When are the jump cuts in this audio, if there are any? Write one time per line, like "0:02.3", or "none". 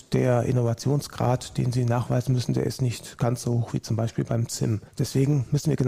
0:04.9